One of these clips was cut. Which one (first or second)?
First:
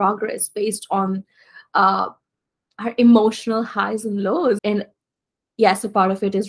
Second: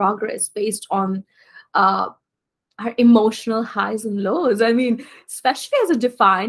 first